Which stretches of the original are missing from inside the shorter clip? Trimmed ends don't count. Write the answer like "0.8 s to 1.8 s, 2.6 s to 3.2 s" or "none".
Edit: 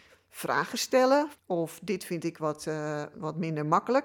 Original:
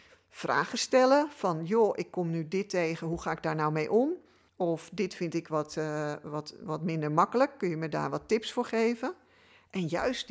1.3 s to 4.4 s, 6.2 s to 6.6 s